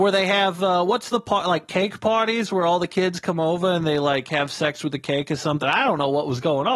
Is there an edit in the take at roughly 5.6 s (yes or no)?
yes